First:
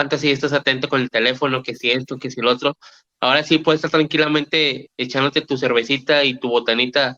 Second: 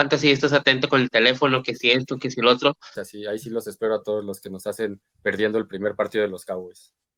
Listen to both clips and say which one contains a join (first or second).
second